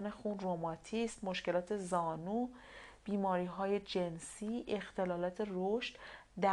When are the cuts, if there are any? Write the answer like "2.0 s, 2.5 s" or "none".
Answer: none